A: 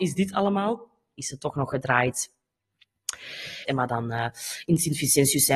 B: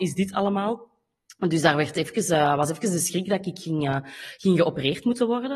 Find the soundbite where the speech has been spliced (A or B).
A